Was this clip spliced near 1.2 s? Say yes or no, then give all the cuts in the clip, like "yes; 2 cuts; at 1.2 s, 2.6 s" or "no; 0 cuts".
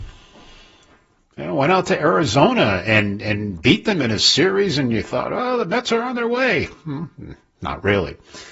yes; 1 cut; at 1.2 s